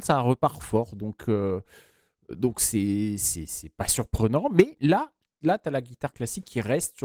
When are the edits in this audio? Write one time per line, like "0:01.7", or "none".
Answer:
none